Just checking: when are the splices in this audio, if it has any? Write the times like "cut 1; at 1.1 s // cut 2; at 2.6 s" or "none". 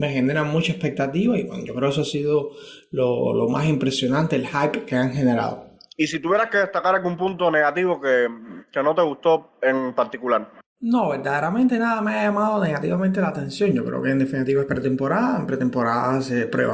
none